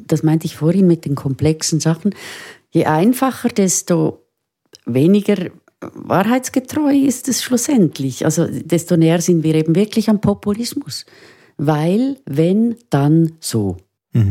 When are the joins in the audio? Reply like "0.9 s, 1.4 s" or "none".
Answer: none